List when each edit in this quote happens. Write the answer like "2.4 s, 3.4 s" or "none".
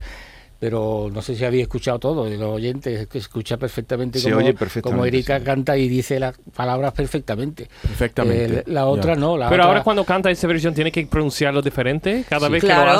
none